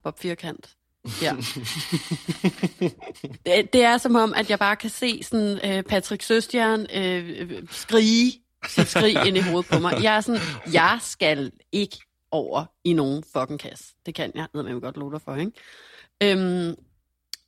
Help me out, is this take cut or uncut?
uncut